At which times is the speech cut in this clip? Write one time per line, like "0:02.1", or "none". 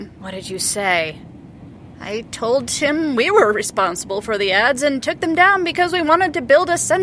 none